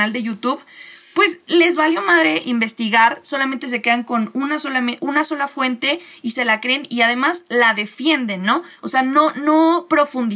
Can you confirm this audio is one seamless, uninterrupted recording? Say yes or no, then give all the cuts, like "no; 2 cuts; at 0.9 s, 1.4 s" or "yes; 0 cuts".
yes; 0 cuts